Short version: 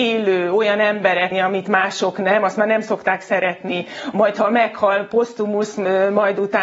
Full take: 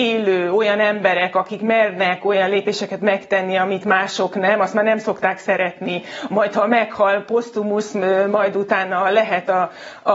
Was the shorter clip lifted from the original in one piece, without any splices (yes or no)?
no